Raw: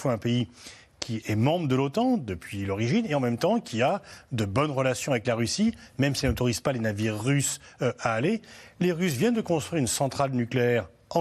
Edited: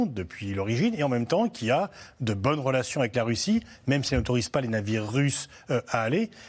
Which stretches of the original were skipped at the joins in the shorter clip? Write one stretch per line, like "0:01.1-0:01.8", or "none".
none

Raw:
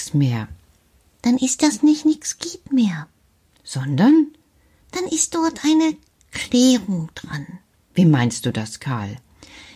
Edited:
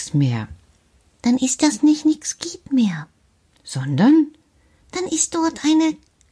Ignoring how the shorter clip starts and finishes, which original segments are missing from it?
none

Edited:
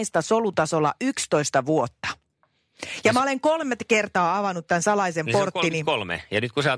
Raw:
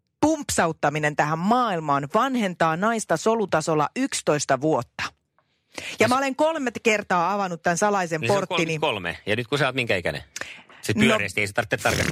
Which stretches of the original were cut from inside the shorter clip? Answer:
none

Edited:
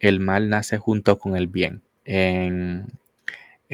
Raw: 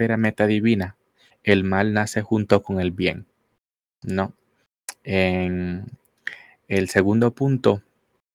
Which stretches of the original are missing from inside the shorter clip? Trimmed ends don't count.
0:03.4-0:05.0

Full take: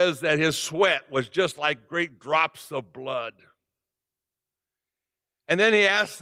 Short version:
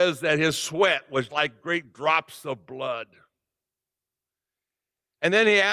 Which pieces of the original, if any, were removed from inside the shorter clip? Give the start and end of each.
0:01.3-0:01.6

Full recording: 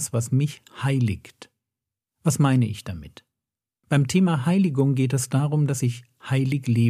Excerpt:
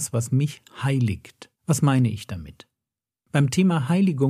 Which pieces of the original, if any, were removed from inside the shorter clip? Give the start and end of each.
0:01.6-0:02.1

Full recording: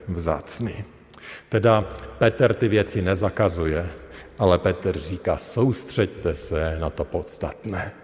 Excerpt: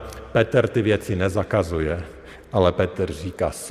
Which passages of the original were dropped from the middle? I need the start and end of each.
none

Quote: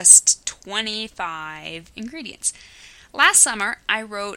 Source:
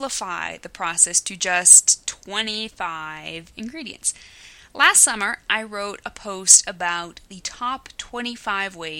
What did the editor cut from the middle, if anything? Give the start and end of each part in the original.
none

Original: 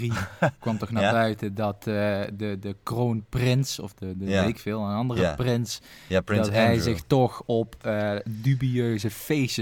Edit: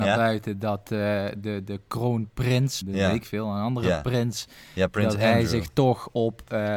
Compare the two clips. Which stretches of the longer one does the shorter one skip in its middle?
0:03.8-0:04.1

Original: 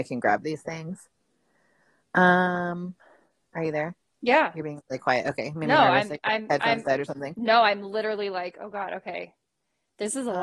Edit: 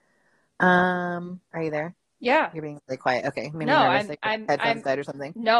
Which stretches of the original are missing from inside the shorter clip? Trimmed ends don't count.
0:03.0-0:03.4

